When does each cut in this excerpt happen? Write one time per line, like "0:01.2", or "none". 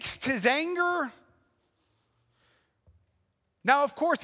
none